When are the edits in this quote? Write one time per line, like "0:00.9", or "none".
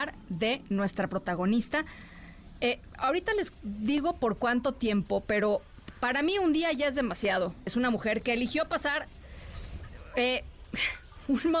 0:07.7

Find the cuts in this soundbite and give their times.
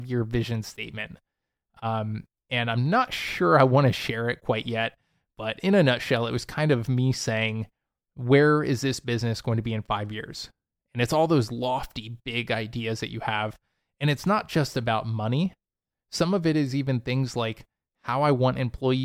none

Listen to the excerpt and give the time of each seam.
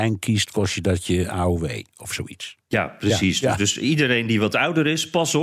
none

